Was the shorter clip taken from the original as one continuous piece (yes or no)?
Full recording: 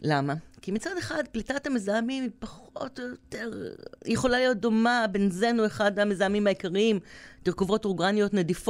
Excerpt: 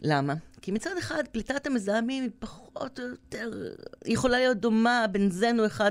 yes